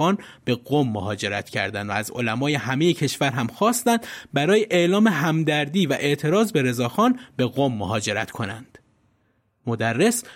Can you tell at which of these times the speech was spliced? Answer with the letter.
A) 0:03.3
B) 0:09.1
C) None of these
C